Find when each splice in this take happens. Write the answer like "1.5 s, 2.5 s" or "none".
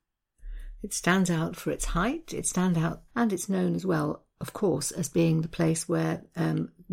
3.1 s